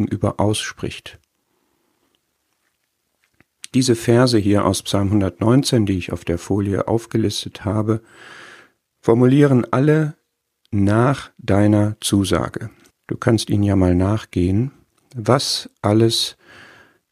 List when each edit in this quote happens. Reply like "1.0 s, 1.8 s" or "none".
12.9 s